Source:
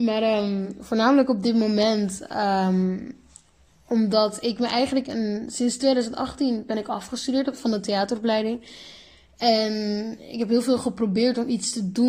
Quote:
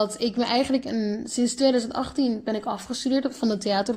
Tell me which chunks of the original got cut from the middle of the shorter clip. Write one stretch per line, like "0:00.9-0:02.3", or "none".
none